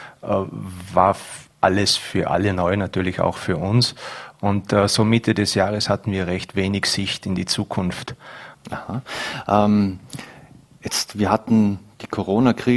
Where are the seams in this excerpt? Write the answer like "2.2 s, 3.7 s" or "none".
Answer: 8.5 s